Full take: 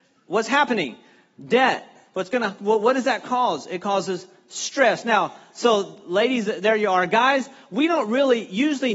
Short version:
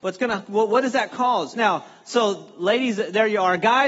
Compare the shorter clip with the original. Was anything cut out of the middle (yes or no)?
yes